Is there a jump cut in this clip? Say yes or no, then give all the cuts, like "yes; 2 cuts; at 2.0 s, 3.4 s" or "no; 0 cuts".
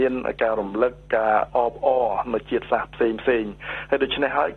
no; 0 cuts